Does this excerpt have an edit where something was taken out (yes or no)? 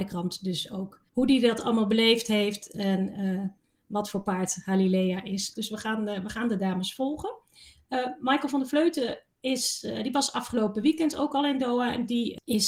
yes